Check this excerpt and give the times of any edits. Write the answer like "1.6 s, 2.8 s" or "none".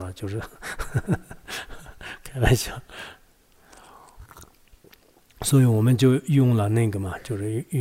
none